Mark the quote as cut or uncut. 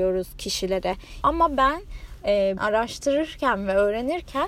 cut